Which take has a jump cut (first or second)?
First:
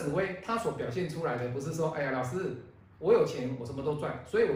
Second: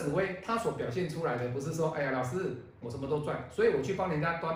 second